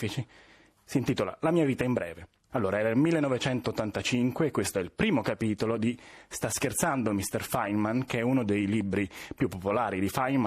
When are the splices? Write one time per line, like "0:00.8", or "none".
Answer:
0:02.5